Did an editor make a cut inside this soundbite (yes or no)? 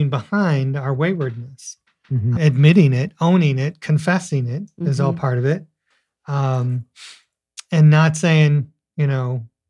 yes